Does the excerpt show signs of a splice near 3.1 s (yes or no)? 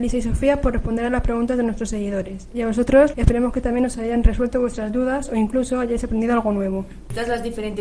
yes